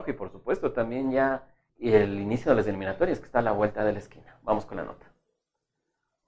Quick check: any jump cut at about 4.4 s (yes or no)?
no